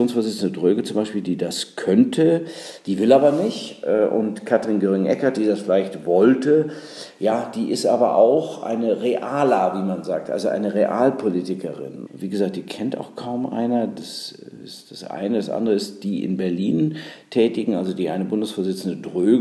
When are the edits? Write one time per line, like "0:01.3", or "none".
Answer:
0:12.1

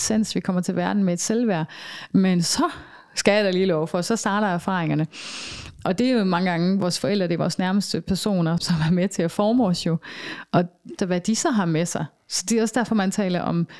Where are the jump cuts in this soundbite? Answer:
0:08.6
0:11.0

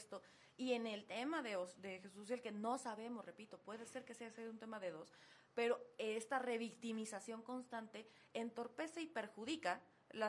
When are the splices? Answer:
none

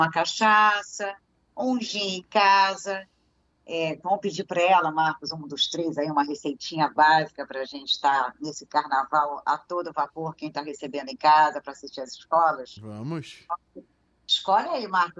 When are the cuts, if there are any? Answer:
none

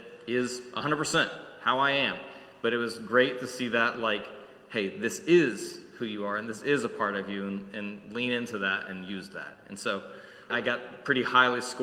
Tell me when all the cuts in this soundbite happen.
0:10.5

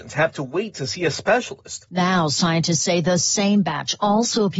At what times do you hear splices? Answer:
0:01.9

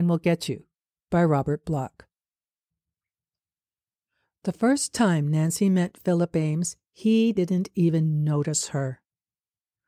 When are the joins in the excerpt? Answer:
none

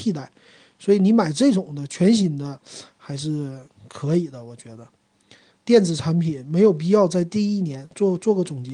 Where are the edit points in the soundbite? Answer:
0:05.6

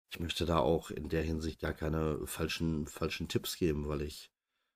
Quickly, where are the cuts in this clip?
none

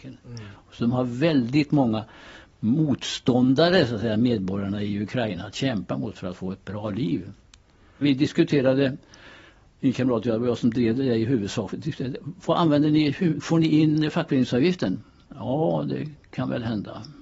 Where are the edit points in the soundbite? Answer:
0:08.0

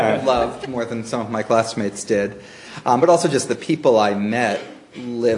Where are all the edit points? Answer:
none

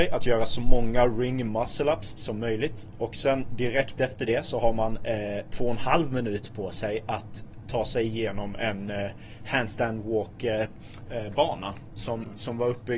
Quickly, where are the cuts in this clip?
none

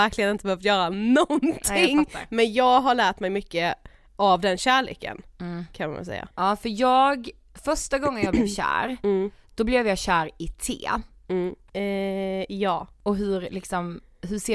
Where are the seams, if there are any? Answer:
0:06.3
0:11.7

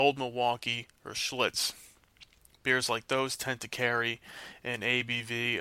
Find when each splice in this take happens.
none

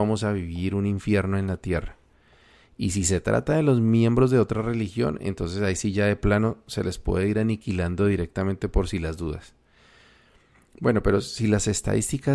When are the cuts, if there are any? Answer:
none

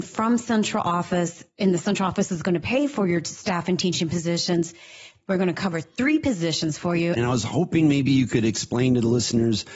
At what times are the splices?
0:05.3
0:07.2

